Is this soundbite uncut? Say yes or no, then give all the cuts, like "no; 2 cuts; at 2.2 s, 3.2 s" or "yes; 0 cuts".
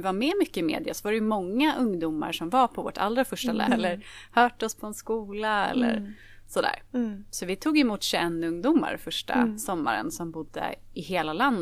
no; 1 cut; at 3.7 s